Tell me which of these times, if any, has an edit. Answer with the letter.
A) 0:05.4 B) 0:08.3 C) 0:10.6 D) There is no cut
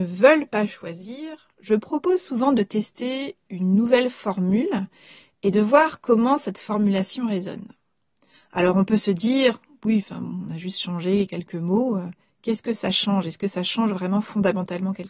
B